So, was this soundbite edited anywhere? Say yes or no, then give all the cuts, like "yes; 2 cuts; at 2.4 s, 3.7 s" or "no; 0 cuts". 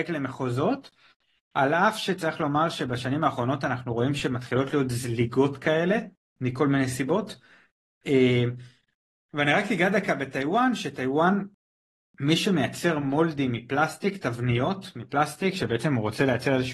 no; 0 cuts